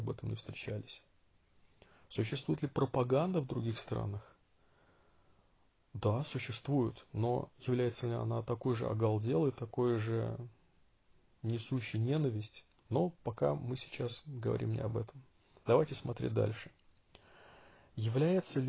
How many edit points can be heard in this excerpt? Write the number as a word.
one